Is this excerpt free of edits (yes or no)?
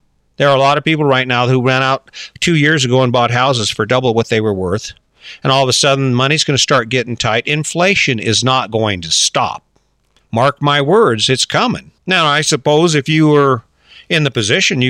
no